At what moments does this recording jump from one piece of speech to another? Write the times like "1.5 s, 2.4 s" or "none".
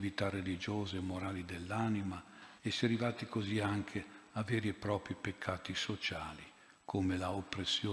2.6 s